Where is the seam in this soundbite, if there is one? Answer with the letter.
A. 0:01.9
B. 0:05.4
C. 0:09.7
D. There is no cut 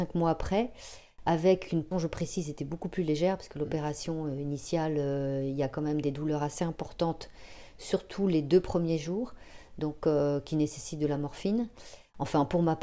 A